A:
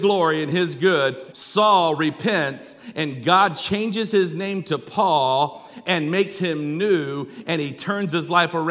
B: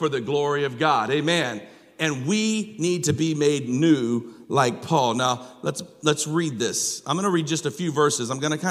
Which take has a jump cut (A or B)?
A